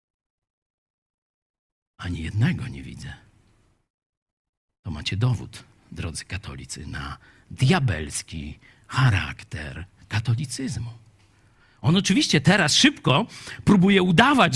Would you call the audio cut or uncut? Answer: uncut